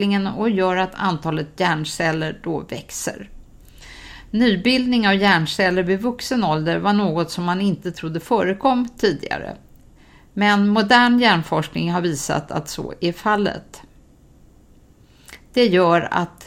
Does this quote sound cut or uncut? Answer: uncut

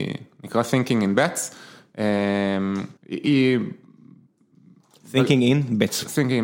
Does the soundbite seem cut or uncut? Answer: cut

